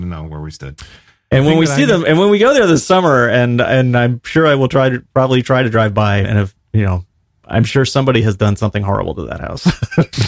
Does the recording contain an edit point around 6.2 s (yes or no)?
yes